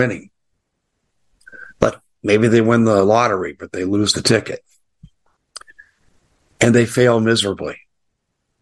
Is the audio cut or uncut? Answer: uncut